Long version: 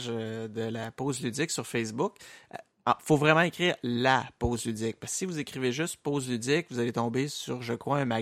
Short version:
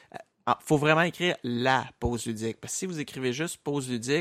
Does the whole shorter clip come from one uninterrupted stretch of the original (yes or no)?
yes